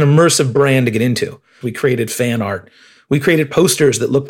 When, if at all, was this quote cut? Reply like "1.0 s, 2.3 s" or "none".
1.6 s

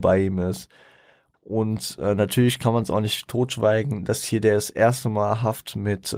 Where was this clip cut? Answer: 1.3 s

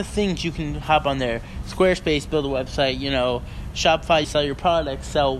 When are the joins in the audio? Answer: 1.6 s, 4.2 s

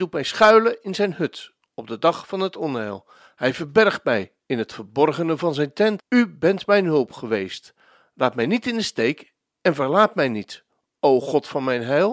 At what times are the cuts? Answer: 6.0 s

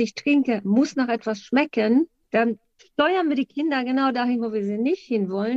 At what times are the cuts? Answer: none

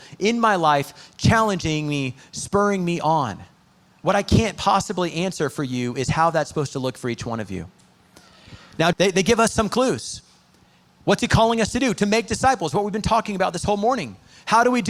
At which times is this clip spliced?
8.9 s

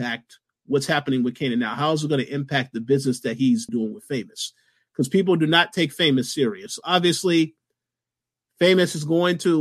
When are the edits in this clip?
3.7 s

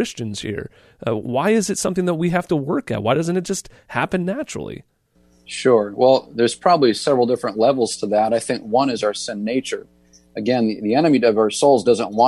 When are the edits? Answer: none

